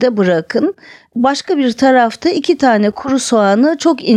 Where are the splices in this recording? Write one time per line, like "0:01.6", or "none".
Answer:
none